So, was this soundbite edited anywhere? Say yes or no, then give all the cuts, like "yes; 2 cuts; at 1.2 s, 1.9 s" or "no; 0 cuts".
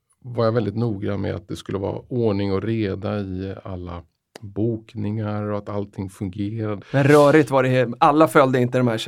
yes; 1 cut; at 6.8 s